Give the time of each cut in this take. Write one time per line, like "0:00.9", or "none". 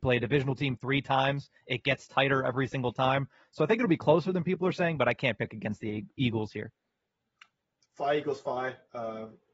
none